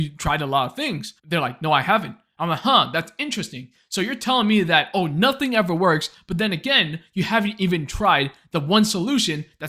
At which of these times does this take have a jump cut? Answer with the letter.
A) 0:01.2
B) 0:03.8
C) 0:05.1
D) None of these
A